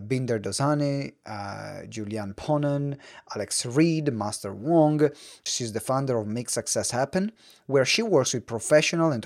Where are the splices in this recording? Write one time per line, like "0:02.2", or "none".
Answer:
0:05.5